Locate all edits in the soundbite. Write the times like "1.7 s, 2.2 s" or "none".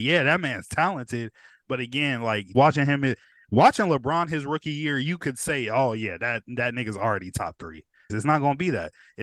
2.5 s, 8.1 s